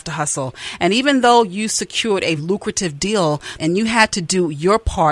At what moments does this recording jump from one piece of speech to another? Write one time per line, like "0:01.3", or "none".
0:02.4
0:03.6

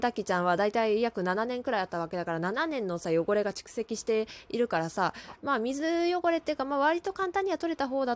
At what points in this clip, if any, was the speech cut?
none

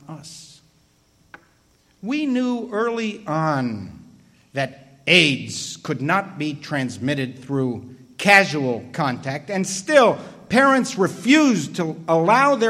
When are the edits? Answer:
none

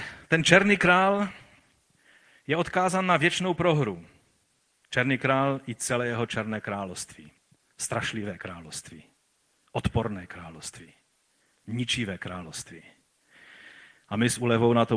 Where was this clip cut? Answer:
none

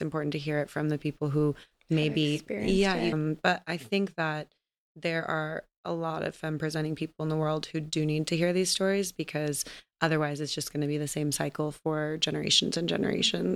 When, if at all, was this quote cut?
0:03.1

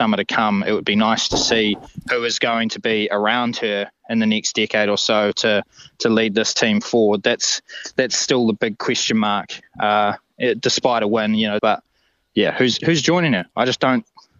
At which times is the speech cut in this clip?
0:11.6
0:12.8

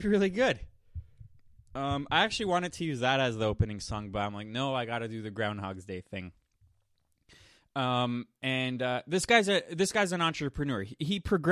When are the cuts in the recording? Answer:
none

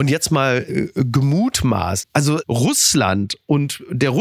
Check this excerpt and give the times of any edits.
0:02.0

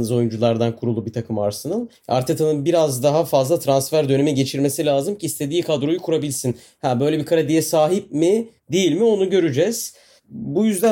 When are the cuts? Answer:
0:02.0

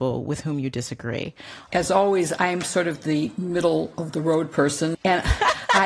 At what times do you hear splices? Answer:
0:01.7
0:04.9

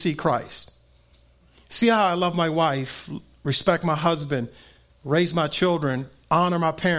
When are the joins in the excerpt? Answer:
none

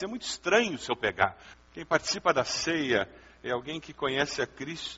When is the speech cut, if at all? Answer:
0:01.5

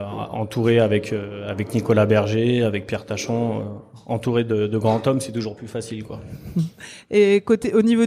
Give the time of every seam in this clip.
none

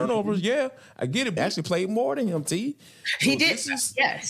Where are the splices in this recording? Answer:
0:01.4

